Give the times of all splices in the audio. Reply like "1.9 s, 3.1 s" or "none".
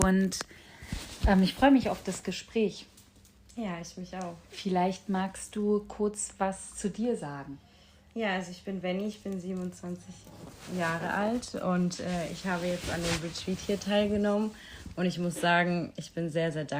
none